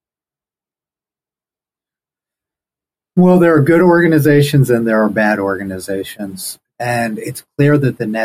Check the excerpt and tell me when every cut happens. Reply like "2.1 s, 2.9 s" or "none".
6.7 s